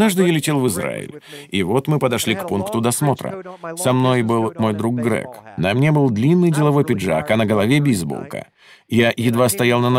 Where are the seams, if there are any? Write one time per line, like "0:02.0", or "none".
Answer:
none